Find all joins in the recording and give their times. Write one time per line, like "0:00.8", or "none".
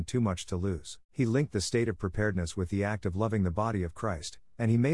0:01.1